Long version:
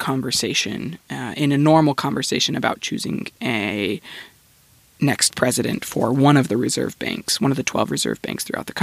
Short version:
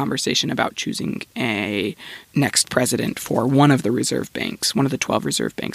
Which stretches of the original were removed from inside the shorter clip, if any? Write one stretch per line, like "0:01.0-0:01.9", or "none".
0:04.3-0:04.9